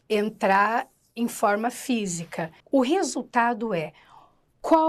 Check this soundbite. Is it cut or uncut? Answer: cut